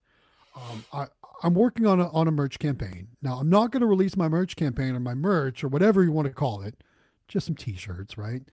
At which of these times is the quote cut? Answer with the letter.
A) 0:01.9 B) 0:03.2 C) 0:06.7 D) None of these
D